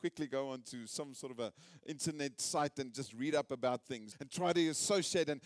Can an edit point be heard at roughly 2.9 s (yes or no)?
no